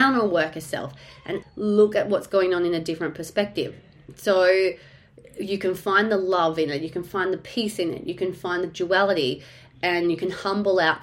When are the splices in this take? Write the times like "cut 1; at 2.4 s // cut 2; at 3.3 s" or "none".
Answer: cut 1; at 1.4 s